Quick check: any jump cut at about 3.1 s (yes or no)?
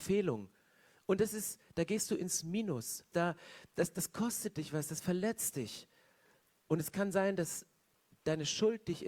yes